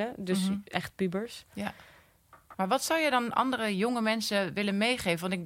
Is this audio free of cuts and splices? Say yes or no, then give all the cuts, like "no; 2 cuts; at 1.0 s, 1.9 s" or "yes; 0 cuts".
no; 1 cut; at 2.5 s